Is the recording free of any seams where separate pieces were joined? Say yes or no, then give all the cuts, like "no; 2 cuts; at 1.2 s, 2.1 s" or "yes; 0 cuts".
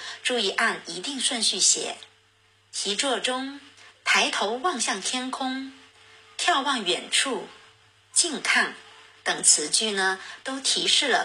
yes; 0 cuts